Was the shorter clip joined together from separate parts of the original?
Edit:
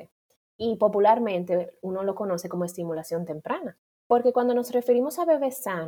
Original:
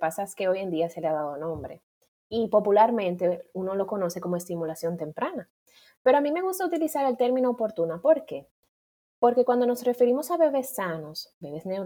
yes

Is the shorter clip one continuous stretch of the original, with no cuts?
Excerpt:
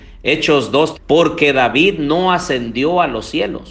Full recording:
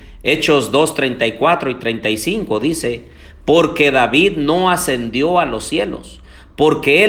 no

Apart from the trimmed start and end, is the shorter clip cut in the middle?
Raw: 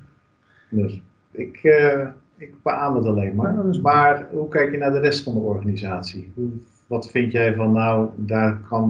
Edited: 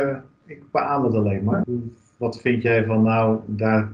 yes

